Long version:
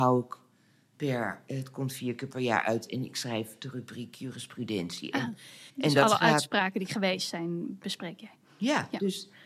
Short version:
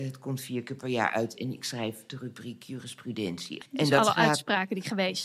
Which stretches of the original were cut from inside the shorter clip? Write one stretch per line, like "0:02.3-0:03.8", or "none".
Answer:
0:05.1-0:05.7